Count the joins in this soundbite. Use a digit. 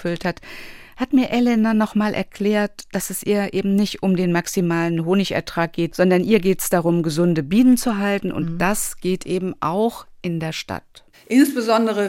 1